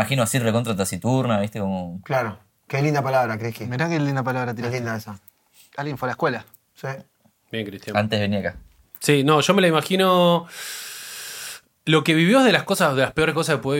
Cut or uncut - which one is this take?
uncut